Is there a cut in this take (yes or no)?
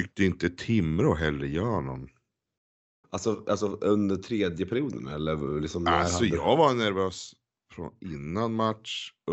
yes